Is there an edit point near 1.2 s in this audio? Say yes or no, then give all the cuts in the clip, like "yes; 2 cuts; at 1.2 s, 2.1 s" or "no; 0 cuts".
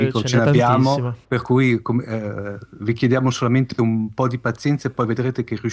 yes; 1 cut; at 1.2 s